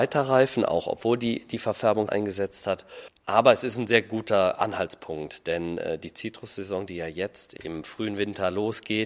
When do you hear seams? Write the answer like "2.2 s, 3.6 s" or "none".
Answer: 2.1 s